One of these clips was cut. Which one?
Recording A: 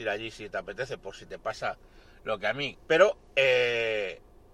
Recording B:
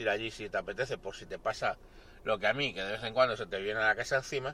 A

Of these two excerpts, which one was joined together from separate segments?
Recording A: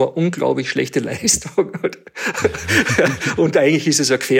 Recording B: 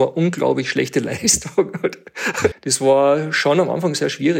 B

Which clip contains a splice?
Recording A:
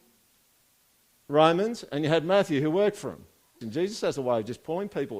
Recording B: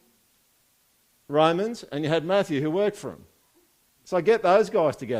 A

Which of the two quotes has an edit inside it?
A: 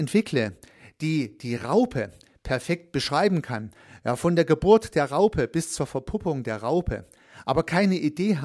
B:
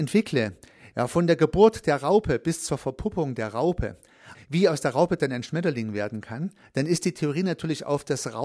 B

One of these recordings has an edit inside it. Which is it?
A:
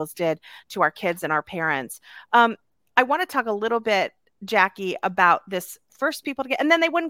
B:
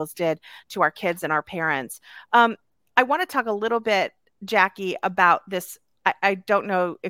A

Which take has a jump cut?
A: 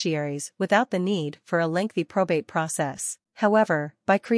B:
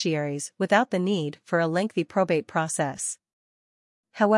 A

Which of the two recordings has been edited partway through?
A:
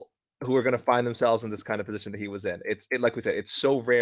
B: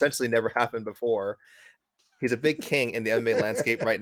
B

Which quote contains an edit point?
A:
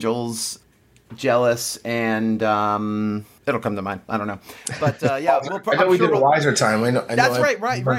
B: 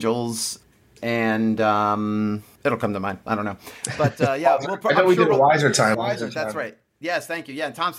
B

